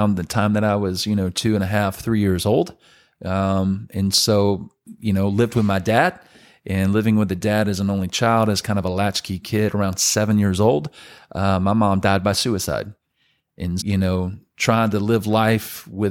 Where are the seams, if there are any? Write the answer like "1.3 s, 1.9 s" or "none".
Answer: 13.8 s